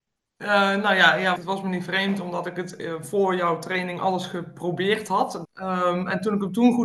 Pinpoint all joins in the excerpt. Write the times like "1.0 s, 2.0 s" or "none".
1.4 s, 5.4 s

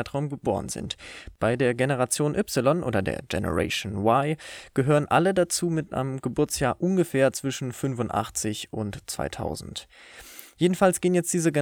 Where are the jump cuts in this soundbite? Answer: none

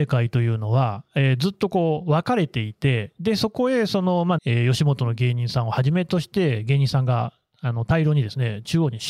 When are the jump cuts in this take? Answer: 4.4 s

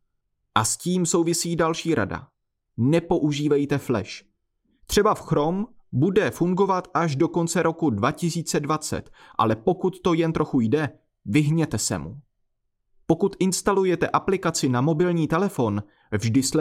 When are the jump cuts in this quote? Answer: 13.0 s

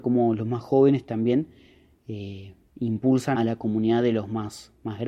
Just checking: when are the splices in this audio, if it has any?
3.3 s

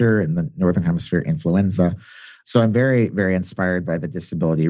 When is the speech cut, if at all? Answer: none

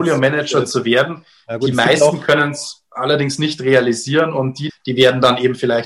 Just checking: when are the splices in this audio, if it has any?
4.7 s

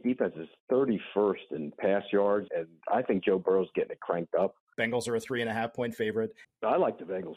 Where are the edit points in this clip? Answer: 2.5 s, 4.7 s, 6.4 s

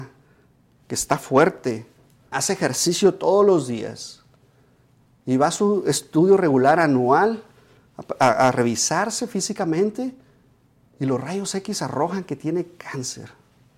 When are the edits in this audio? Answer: 2.3 s

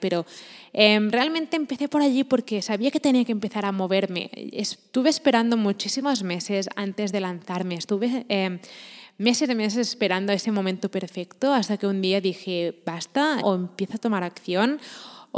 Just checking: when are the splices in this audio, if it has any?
13.4 s

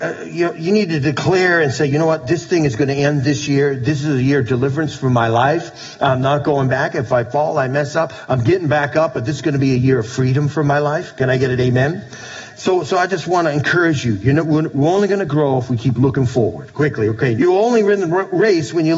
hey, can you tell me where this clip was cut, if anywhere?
17.4 s

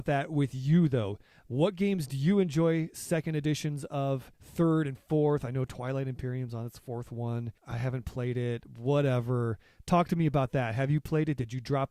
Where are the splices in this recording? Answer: 7.6 s

